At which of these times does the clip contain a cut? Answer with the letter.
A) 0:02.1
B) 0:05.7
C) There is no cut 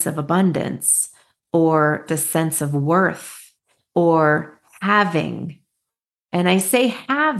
A